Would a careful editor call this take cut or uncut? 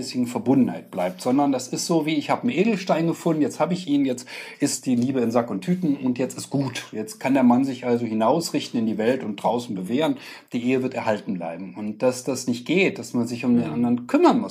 uncut